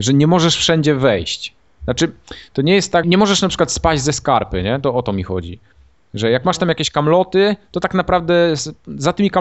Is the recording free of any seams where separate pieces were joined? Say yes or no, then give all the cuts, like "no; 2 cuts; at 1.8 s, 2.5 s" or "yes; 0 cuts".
no; 1 cut; at 3.0 s